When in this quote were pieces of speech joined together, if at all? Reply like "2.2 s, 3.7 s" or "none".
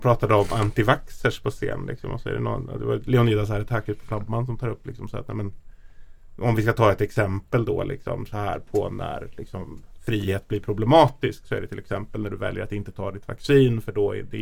none